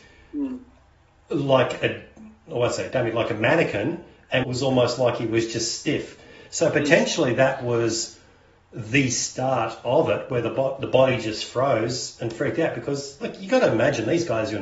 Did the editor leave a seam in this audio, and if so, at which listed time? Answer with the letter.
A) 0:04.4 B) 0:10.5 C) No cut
A